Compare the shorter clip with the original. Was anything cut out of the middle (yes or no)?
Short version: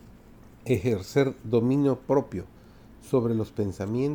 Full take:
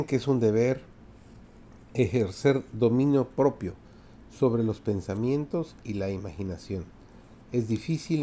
no